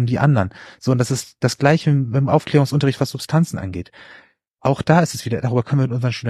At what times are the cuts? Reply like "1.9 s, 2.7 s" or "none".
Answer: none